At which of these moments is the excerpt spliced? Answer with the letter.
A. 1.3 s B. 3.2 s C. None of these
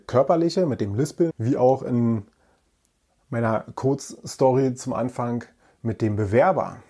A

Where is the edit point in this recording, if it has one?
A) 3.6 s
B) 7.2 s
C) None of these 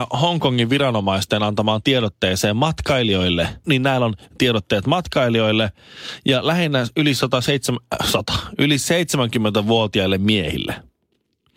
A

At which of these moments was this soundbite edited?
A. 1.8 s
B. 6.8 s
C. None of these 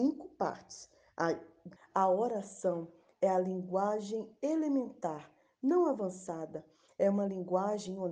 A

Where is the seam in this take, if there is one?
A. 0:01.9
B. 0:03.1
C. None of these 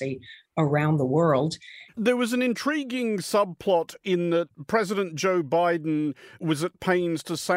A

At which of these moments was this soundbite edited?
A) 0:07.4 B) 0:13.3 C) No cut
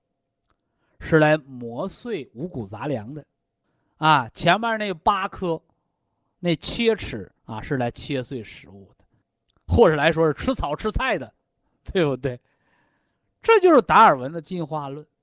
A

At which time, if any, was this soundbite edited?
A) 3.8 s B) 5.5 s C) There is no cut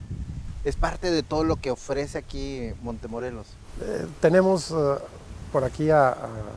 C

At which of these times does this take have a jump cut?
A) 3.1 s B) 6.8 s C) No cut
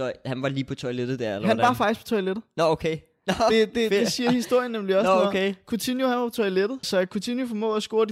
B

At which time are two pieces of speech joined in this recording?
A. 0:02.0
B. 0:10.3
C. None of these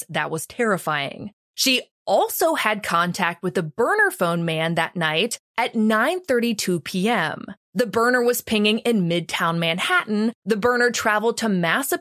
B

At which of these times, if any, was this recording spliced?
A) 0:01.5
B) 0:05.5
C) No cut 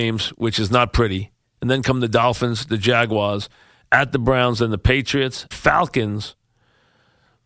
B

